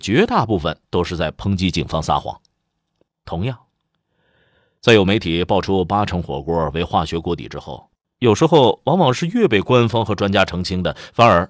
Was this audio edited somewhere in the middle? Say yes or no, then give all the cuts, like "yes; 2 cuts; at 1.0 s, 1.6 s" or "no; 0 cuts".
yes; 2 cuts; at 3.1 s, 8.0 s